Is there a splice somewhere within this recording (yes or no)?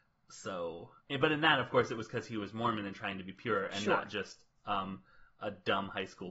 yes